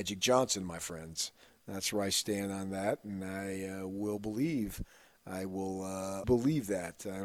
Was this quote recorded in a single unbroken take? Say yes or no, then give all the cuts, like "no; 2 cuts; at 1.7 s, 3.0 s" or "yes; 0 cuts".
no; 1 cut; at 6.2 s